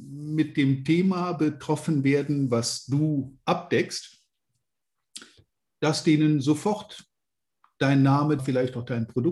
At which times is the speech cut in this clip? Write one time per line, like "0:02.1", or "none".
0:08.4